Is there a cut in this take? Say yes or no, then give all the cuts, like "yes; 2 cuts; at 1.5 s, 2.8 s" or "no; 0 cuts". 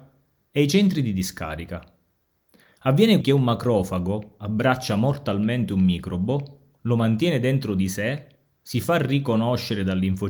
yes; 1 cut; at 3.2 s